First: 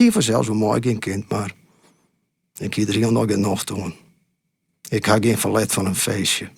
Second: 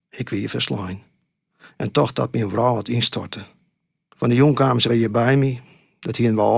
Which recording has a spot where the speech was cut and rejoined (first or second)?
second